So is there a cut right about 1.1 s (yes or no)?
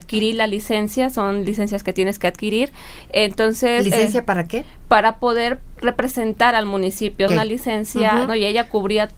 no